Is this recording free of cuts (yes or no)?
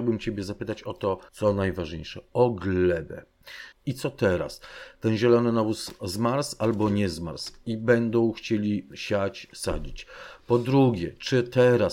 no